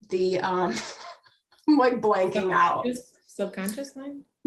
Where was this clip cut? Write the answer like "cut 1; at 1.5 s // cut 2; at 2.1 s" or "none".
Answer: none